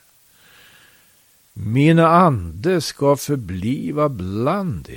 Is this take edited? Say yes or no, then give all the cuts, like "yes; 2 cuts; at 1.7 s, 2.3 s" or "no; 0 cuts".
no; 0 cuts